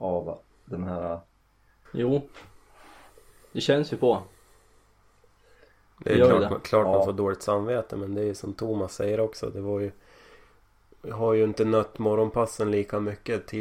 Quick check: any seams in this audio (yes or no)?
yes